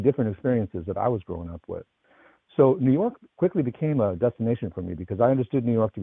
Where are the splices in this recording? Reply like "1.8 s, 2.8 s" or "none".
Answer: none